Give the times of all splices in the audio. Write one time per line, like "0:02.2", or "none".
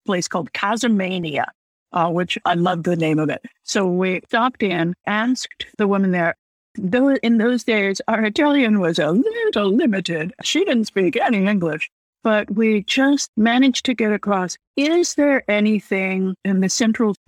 none